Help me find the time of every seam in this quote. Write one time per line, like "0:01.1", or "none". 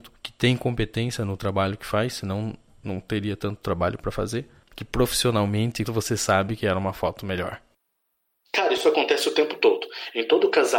0:04.7
0:05.8